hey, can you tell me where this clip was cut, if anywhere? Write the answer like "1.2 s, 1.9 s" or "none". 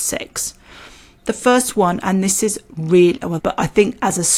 3.4 s